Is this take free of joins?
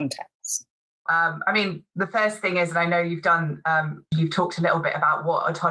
no; 2 cuts; at 1.1 s, 4.1 s

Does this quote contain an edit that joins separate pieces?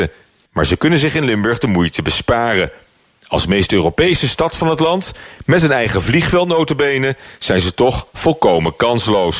no; 0 cuts

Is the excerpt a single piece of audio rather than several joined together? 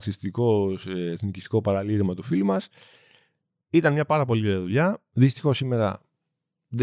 yes; 0 cuts

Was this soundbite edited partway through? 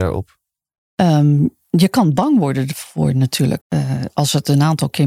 yes; 1 cut; at 3.6 s

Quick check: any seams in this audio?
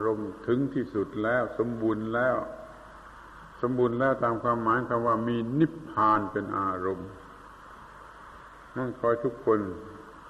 no; 0 cuts

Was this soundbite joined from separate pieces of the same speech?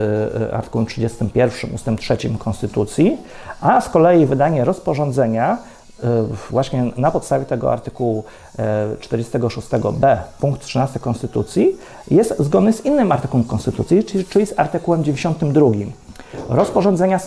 no; 0 cuts

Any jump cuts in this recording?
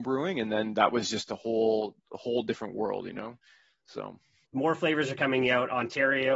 no; 0 cuts

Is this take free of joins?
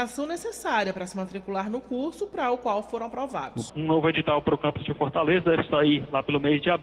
no; 1 cut; at 3.7 s

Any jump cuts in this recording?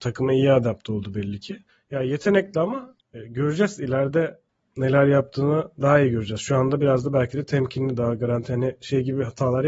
no; 0 cuts

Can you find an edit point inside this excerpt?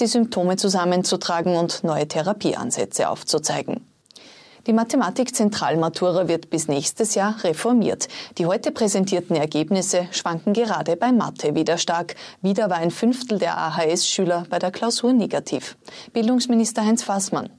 no; 0 cuts

